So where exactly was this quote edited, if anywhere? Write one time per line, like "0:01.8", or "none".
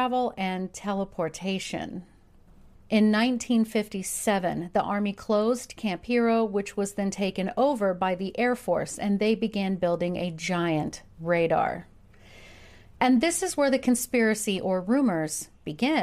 0:02.7